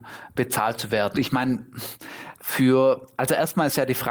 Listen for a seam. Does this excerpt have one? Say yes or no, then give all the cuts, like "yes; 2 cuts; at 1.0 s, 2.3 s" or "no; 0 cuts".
yes; 2 cuts; at 1.1 s, 2.4 s